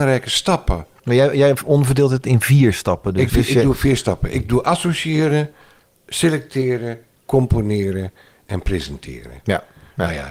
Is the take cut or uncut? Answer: cut